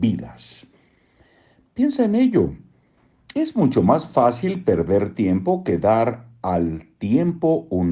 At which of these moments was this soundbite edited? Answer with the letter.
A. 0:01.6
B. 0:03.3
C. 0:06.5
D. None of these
B